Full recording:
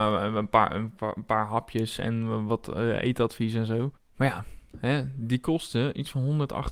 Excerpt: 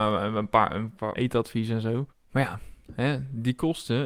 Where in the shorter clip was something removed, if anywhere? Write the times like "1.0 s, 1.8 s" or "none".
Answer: 1.1 s